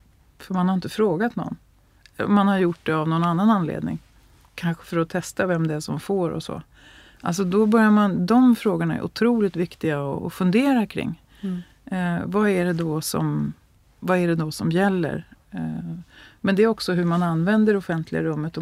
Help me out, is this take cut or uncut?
uncut